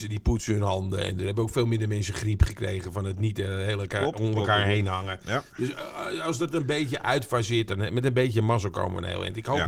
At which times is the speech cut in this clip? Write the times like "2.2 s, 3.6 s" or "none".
none